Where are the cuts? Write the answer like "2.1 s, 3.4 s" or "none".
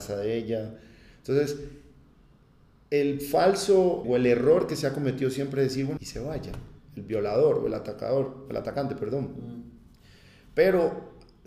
4.0 s, 6.0 s